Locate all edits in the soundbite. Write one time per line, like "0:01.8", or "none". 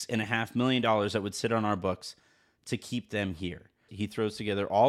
0:03.9